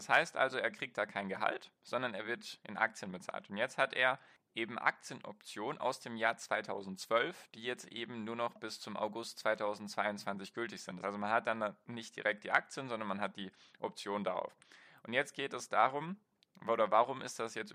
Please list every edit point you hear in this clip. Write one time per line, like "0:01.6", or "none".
0:11.0